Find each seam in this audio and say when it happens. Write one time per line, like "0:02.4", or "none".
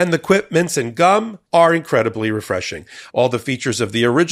0:01.5
0:03.1